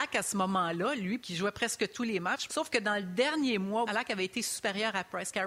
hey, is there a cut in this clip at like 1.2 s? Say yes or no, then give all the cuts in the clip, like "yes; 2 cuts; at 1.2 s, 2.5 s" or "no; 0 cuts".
yes; 3 cuts; at 1.2 s, 2.5 s, 3.8 s